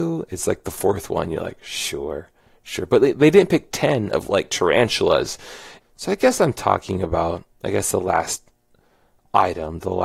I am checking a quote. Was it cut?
yes; 1 cut; at 5.8 s

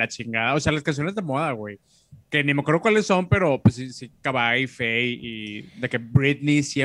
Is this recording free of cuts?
yes; 0 cuts

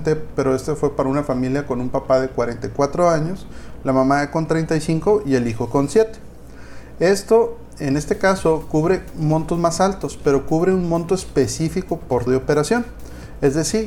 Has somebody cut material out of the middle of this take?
yes; 1 cut; at 12.3 s

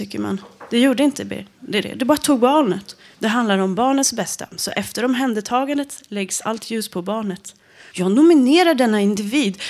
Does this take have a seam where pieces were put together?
yes; 2 cuts; at 3.1 s, 7.9 s

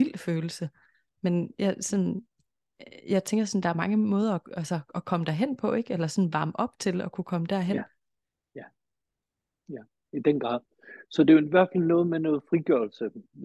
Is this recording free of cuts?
yes; 0 cuts

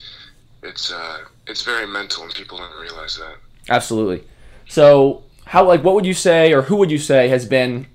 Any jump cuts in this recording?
yes; 1 cut; at 1.4 s

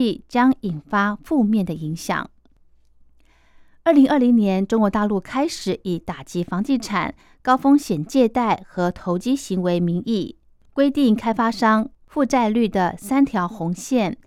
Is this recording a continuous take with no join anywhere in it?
yes; 0 cuts

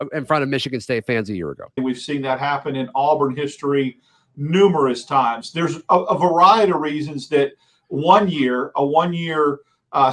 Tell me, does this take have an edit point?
yes; 1 cut; at 1.8 s

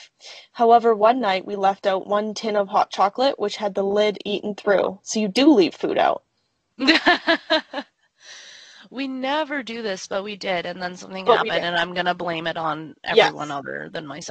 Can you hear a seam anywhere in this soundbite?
no; 0 cuts

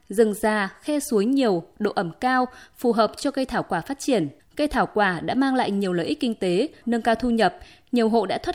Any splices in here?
yes; 2 cuts; at 4.4 s, 6.8 s

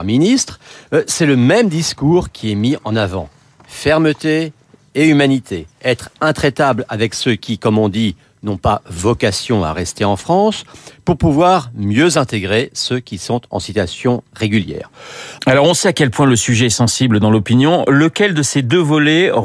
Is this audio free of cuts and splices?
no; 2 cuts; at 5.7 s, 15.4 s

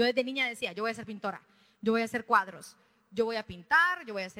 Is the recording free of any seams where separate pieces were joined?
yes; 0 cuts

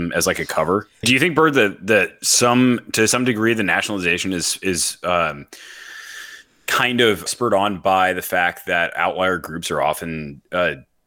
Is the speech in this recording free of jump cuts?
no; 2 cuts; at 1.0 s, 7.3 s

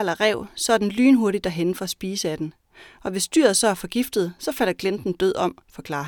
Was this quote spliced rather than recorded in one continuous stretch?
no; 0 cuts

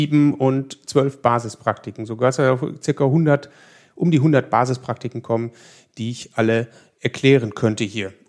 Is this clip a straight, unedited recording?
yes; 0 cuts

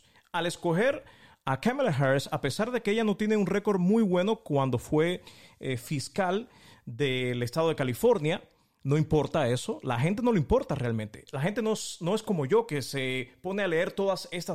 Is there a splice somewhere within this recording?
no; 0 cuts

